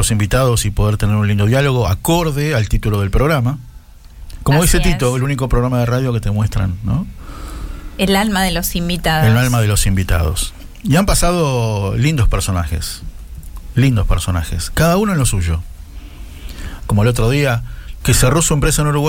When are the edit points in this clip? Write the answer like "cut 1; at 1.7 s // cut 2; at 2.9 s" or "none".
cut 1; at 16.8 s // cut 2; at 18.0 s